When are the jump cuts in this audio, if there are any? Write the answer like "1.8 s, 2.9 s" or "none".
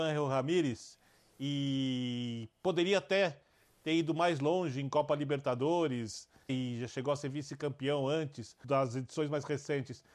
6.5 s, 8.6 s